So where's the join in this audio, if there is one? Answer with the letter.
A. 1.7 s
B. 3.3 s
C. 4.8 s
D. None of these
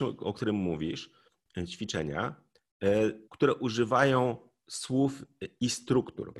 B